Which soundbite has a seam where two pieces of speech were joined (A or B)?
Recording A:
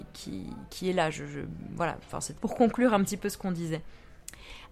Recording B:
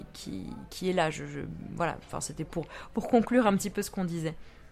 A